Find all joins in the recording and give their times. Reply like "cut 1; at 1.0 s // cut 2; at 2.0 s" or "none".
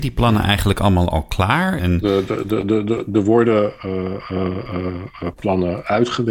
cut 1; at 1.8 s